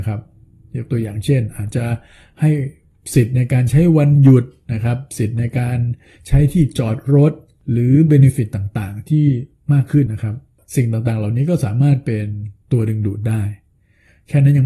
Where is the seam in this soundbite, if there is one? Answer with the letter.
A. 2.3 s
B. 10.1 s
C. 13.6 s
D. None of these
B